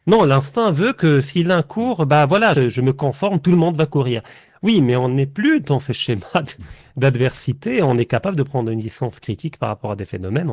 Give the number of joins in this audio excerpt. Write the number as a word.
one